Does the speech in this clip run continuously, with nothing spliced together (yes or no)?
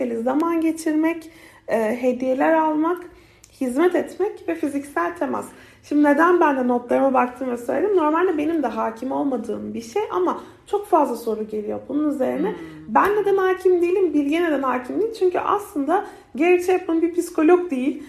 yes